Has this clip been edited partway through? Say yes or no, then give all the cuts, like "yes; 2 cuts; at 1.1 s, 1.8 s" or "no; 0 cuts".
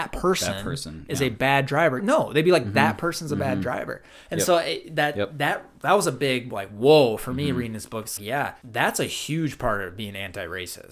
yes; 2 cuts; at 2.0 s, 8.2 s